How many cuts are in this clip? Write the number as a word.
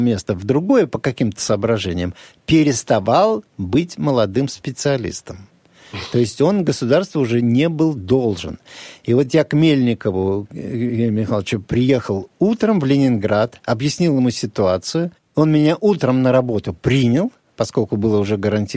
one